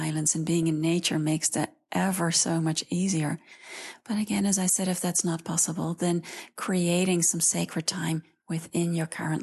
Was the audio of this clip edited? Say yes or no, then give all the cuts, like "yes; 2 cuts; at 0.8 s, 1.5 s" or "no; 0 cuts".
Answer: no; 0 cuts